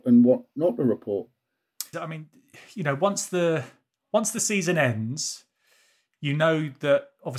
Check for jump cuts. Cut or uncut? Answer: cut